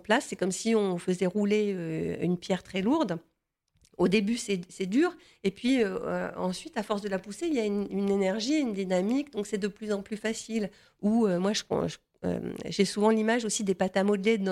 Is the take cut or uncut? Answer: uncut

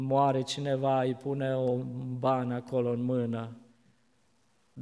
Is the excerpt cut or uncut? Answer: uncut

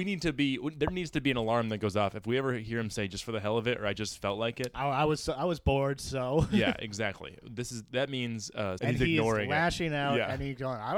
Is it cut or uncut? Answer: cut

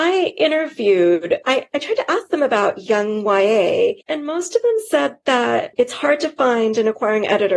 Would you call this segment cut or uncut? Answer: cut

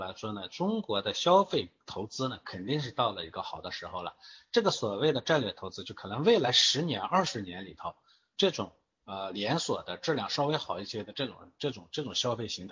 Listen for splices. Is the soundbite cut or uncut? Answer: uncut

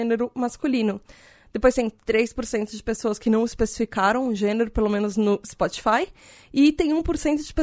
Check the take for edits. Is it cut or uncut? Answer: uncut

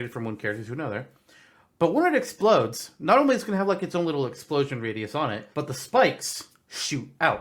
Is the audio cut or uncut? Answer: cut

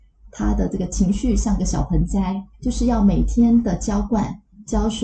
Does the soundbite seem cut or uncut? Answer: cut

